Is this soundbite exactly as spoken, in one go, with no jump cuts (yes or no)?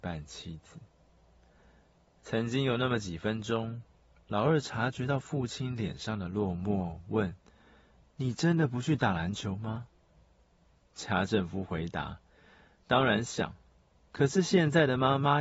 yes